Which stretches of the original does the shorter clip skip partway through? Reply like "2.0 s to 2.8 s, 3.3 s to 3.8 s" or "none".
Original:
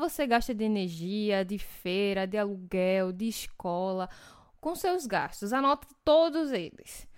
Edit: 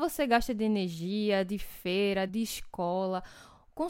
2.3 s to 3.1 s